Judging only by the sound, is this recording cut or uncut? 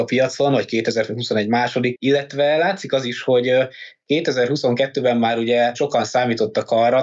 cut